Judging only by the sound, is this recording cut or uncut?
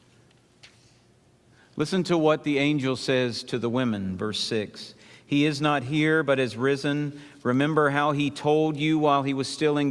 uncut